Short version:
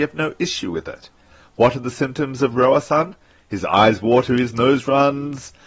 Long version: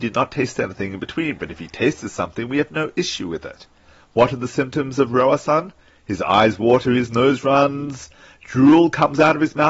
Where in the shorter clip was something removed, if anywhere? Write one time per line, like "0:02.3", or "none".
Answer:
none